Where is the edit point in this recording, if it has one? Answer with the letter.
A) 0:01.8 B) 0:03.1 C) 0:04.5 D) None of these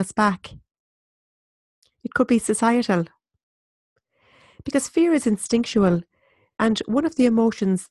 A